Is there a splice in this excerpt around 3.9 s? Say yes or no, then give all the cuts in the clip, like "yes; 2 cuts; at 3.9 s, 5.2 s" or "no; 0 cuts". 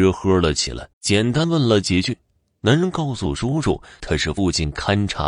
no; 1 cut; at 0.9 s